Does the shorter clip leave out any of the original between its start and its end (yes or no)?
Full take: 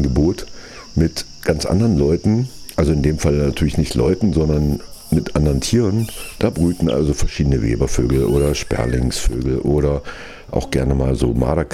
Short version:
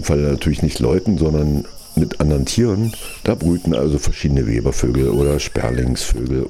no